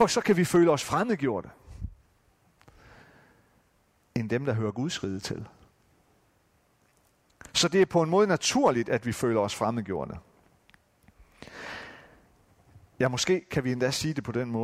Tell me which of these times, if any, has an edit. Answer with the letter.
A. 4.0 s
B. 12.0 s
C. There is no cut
A